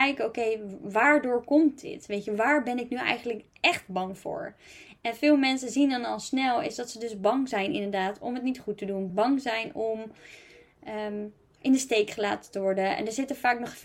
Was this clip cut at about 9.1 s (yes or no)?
yes